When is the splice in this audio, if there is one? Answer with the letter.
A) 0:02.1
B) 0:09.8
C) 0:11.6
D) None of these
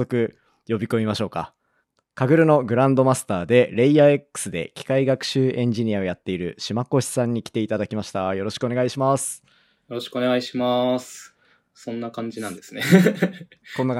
C